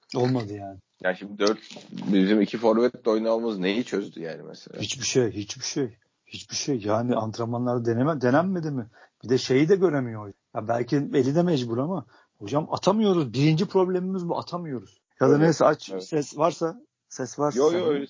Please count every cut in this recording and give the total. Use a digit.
1